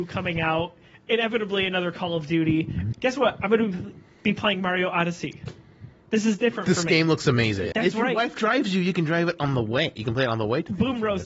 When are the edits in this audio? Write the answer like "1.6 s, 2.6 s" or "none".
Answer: 2.9 s, 7.7 s